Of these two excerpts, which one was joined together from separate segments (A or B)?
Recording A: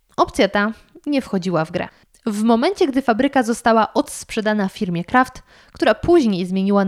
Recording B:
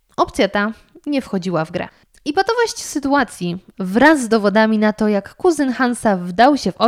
B